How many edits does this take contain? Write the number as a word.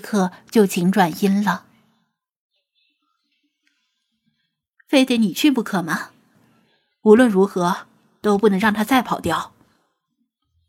one